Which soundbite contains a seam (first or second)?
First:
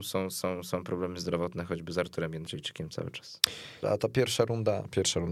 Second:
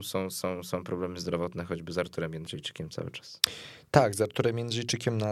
first